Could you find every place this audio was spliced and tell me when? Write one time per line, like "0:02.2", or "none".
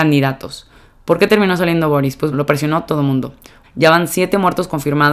0:02.3
0:03.6